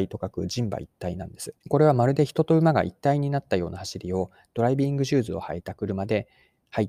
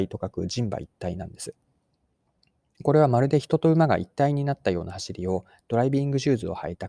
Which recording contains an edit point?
first; 1 cut; at 1.6 s

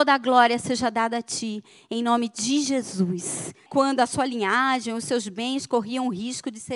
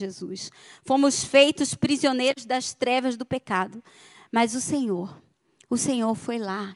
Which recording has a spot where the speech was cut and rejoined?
first; 1 cut; at 3.7 s

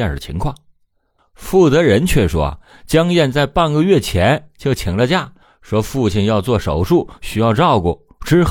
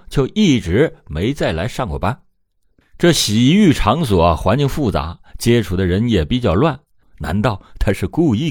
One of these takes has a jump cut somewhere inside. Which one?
second; 1 cut; at 7.0 s

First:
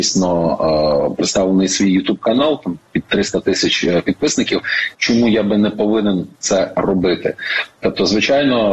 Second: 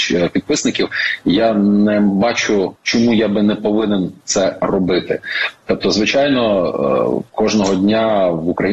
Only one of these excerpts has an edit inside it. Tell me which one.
first; 1 cut; at 4.9 s

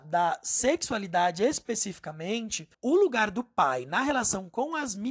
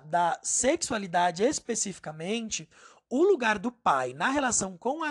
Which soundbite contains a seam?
first; 1 cut; at 2.7 s

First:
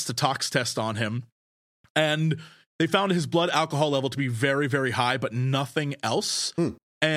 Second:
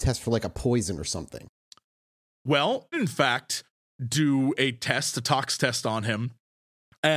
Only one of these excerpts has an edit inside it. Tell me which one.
second; 1 cut; at 2.9 s

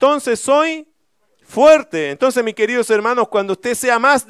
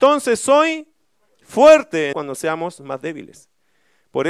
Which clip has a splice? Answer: second; 1 cut; at 2.1 s

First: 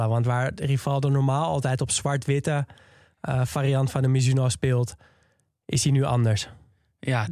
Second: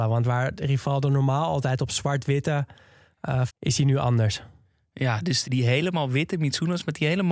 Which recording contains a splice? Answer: second; 2 cuts; at 3.5 s, 5.4 s

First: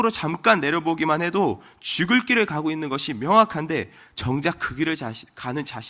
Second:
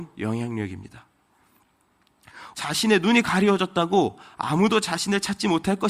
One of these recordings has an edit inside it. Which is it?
second; 1 cut; at 2.5 s

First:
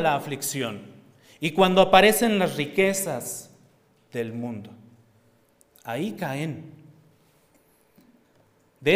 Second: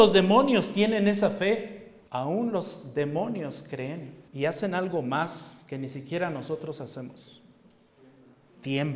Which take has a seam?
second; 2 cuts; at 2.1 s, 4.3 s

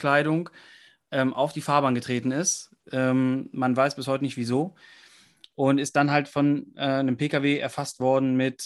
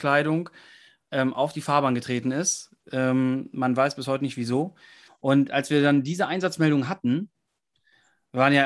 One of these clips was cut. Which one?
second; 1 cut; at 5.1 s

